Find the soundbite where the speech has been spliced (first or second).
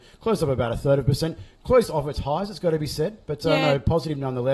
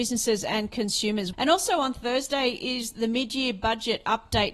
second